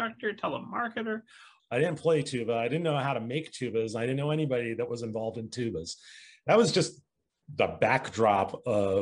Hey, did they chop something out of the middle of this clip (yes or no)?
yes